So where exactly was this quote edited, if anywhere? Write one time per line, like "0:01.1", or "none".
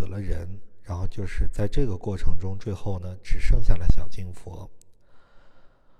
none